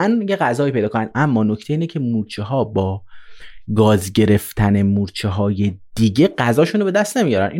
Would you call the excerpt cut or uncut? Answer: cut